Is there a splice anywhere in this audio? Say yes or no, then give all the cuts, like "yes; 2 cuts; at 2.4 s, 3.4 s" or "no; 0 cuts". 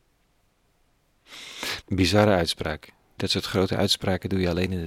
yes; 2 cuts; at 1.8 s, 3.2 s